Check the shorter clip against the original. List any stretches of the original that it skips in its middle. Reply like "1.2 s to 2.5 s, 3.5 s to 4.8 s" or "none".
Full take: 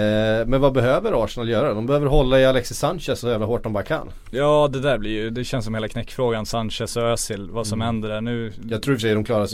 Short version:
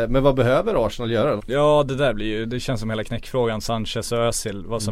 1.7 s to 4.2 s